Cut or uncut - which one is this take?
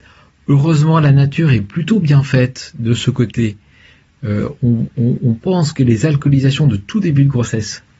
uncut